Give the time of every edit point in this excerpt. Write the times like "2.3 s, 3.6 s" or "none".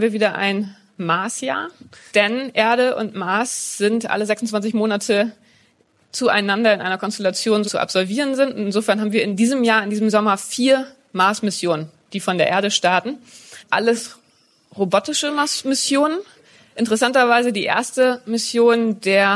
7.6 s